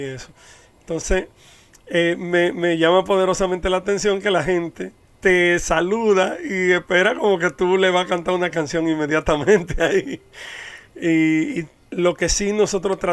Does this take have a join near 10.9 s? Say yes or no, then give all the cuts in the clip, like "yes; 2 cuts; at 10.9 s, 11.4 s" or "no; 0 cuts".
no; 0 cuts